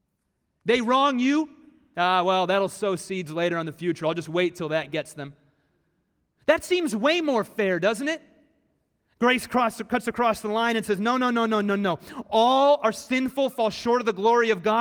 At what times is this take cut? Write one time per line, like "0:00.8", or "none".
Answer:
none